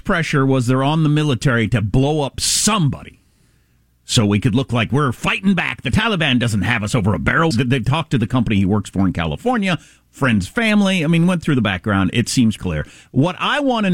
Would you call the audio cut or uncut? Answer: cut